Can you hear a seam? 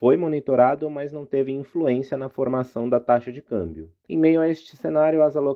no; 0 cuts

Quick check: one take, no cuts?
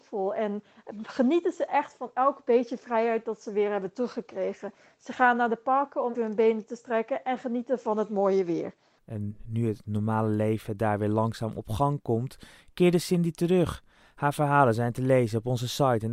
no; 2 cuts; at 6.1 s, 9.0 s

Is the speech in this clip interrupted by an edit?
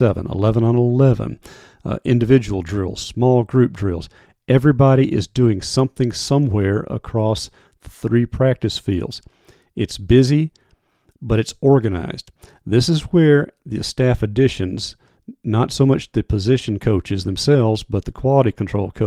no; 0 cuts

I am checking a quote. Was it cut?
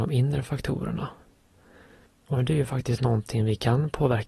yes; 1 cut; at 2.1 s

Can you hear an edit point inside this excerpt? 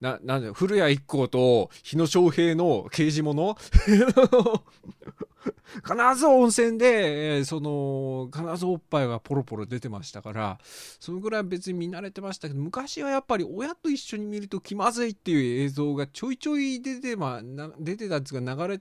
no; 0 cuts

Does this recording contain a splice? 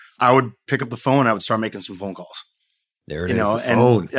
no; 0 cuts

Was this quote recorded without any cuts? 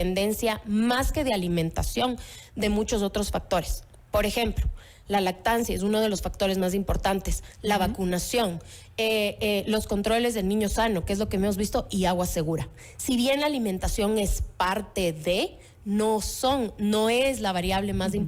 yes; 0 cuts

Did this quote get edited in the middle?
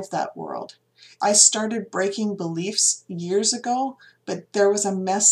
no; 0 cuts

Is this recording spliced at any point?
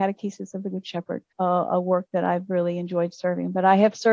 yes; 1 cut; at 1.3 s

